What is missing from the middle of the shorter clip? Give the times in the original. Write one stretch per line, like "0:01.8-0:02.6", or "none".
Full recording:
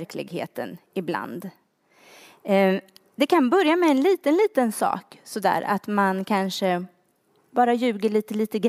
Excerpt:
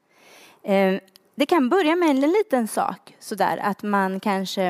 0:04.0-0:04.3